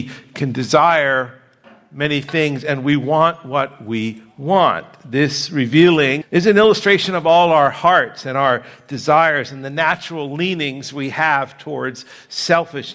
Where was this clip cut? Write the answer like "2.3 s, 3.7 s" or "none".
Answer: 6.2 s